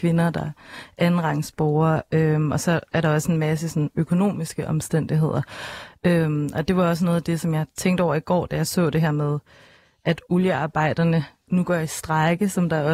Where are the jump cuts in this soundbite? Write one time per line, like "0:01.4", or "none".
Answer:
none